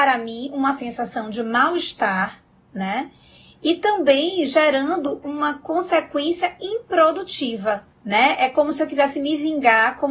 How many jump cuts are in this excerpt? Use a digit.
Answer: 2